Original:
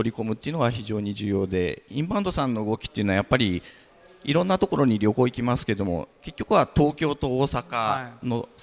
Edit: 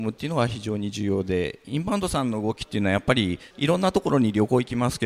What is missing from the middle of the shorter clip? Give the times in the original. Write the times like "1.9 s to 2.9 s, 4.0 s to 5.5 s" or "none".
3.7 s to 4.2 s